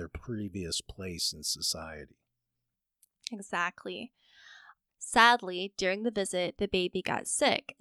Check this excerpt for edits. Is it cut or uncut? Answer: cut